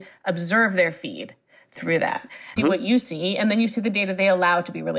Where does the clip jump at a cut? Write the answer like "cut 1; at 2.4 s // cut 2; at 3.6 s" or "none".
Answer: cut 1; at 2.6 s